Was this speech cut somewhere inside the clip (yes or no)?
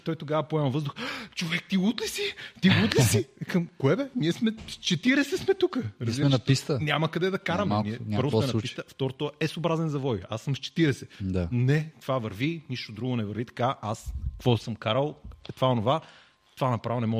no